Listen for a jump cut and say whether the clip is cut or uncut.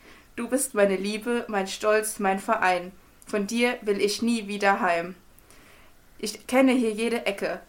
uncut